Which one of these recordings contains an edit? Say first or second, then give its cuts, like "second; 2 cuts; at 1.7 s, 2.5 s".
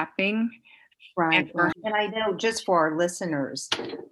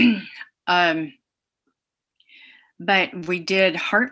first; 1 cut; at 1.7 s